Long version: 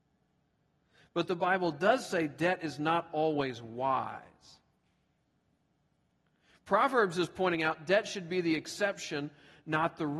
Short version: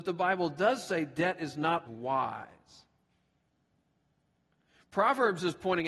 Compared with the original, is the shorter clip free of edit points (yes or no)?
no